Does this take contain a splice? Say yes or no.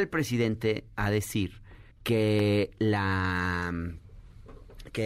yes